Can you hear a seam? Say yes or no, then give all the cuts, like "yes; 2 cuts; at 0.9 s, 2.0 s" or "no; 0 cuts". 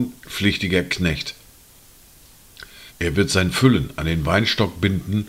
yes; 1 cut; at 2.9 s